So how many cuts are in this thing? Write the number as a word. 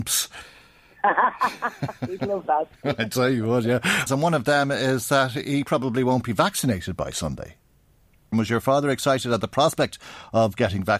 two